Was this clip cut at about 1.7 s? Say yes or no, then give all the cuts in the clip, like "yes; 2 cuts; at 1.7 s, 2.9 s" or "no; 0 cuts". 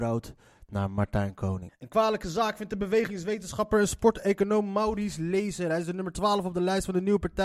yes; 1 cut; at 1.7 s